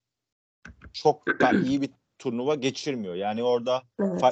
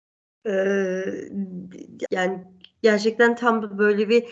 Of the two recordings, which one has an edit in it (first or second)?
second